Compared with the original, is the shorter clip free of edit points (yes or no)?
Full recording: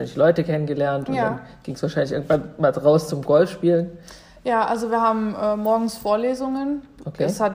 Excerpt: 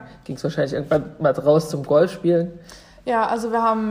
yes